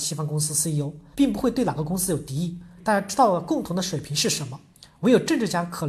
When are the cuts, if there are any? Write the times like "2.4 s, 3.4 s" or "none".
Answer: 1.1 s, 2.8 s